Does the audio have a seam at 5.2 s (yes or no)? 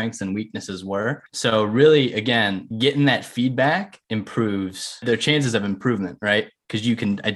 no